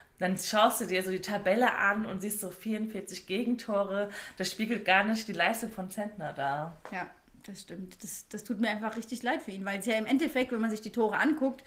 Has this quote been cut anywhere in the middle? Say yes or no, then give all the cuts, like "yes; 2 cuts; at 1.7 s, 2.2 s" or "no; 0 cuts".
no; 0 cuts